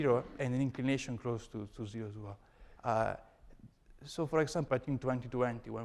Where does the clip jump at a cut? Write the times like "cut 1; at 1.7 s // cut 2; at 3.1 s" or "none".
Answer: cut 1; at 2.8 s // cut 2; at 4.7 s